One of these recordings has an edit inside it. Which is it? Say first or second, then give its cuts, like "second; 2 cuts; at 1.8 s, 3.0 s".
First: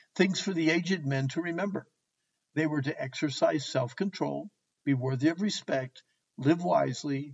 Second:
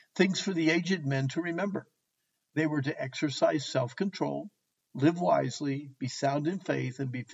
second; 1 cut; at 4.8 s